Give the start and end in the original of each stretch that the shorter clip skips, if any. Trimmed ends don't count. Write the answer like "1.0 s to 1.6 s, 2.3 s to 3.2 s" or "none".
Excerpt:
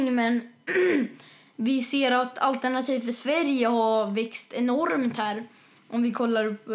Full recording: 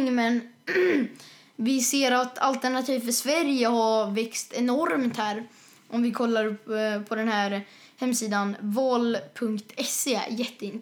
none

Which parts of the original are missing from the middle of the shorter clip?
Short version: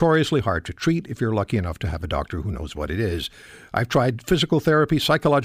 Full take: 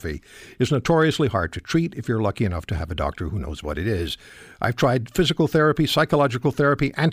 none

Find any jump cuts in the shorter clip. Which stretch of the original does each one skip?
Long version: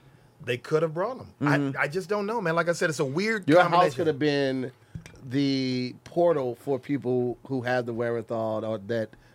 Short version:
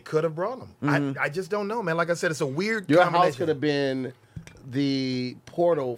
none

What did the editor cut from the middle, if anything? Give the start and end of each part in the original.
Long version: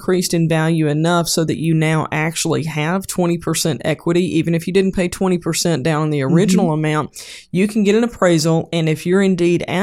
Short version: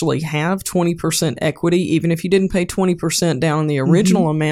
none

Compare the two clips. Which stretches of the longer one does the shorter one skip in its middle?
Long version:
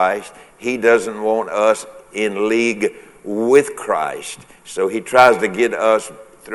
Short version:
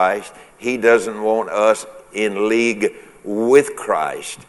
none

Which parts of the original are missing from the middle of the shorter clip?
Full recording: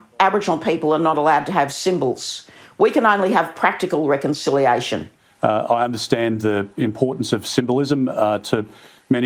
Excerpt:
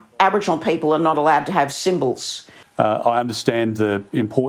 2.6 s to 5.3 s

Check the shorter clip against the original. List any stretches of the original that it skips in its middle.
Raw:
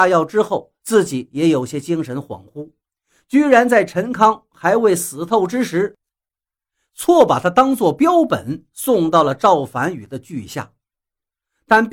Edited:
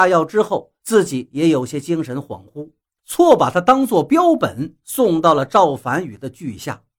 3.0 s to 6.9 s

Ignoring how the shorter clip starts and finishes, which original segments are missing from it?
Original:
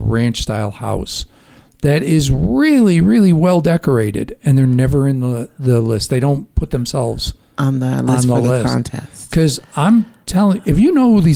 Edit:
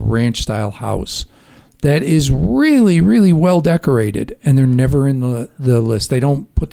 none

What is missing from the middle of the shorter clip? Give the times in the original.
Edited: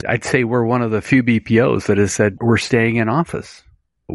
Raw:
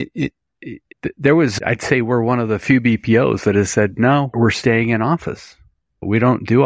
4.0 s to 4.3 s

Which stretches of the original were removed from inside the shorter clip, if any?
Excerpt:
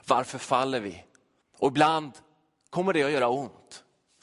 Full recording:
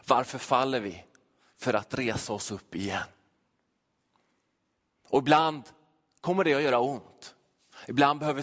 1.4 s to 4.9 s

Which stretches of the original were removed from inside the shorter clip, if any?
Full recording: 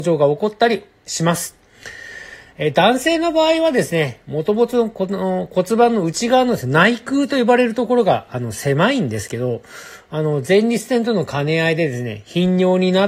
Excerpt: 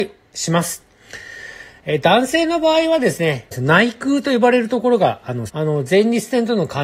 4.2 s to 6.6 s, 8.5 s to 10.1 s

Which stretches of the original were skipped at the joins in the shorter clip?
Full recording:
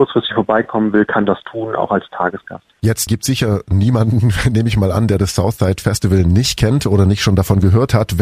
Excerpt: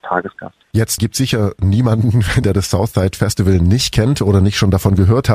4.5 s to 5.1 s

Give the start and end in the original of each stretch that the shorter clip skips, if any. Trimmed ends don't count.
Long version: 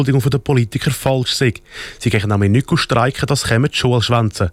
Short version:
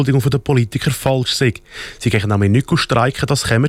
none

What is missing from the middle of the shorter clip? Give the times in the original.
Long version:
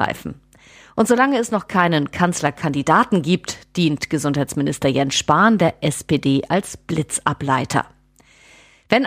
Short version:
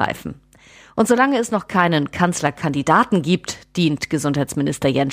none

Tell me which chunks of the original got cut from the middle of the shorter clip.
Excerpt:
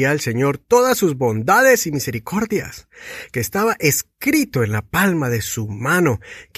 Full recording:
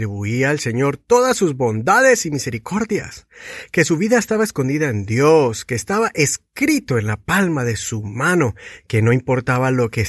3.7 s to 5.7 s

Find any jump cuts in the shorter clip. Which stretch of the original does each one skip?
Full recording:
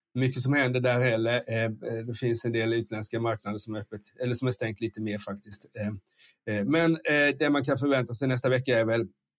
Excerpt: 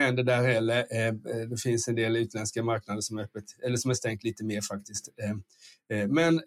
none

